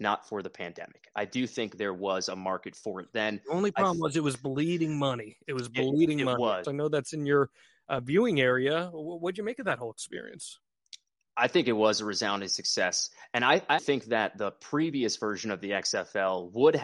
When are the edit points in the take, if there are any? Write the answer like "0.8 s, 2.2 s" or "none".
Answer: 6.6 s, 13.8 s